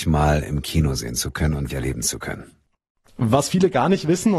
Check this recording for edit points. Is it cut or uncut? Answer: cut